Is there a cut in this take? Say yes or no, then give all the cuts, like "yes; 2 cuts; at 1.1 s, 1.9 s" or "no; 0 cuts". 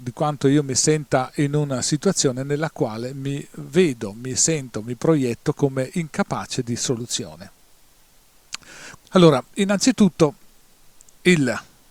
yes; 1 cut; at 9.0 s